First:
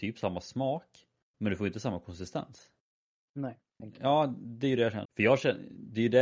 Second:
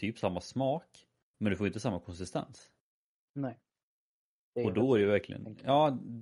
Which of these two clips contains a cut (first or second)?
first